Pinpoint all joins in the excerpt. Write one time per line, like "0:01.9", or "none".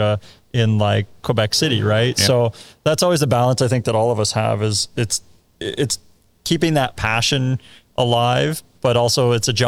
none